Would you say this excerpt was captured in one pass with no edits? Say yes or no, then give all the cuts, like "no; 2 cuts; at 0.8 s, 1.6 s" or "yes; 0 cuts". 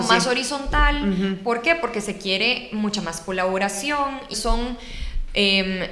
no; 1 cut; at 4.3 s